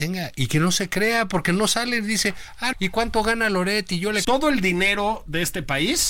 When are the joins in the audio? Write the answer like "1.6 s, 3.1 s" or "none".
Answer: 2.7 s, 4.2 s

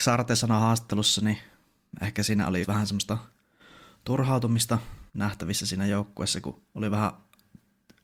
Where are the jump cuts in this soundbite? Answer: 2.6 s, 5.1 s

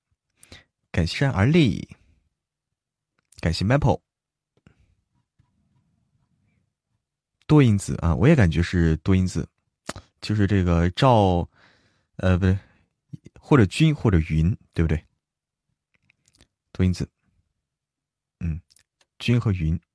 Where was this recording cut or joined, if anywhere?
1.1 s

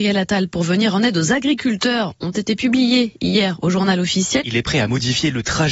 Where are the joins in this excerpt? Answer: 4.4 s

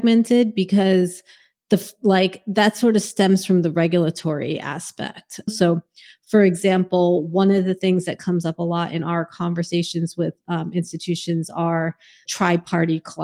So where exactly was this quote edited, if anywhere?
5.5 s, 12.3 s

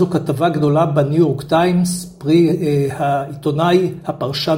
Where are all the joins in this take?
none

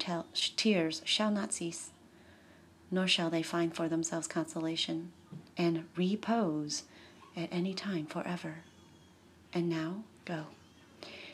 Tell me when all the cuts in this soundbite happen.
10.1 s

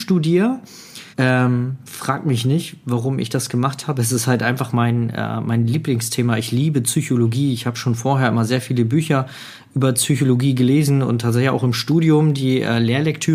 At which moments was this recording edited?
1.1 s

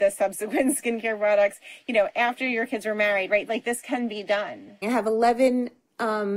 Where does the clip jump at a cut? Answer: 3.5 s, 4.8 s

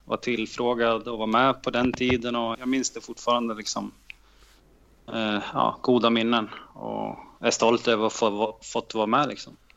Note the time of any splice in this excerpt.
2.5 s

